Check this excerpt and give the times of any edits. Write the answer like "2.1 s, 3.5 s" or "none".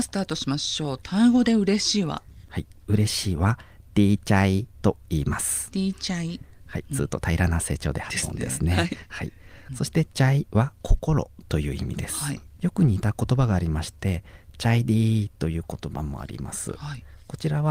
4.7 s, 9.7 s